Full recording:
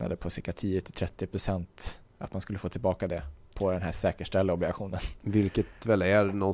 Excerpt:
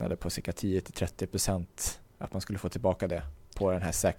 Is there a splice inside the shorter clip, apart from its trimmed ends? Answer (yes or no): no